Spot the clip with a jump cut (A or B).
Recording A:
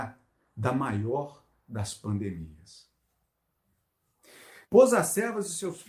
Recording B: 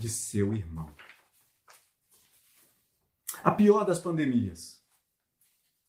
A